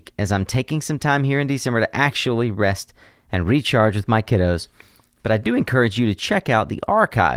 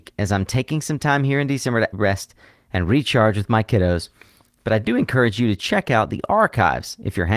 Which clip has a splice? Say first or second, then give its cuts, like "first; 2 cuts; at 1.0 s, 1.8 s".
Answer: second; 1 cut; at 1.9 s